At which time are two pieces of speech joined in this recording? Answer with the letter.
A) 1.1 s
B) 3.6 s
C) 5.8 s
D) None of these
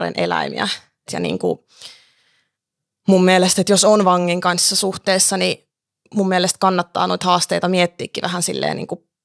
A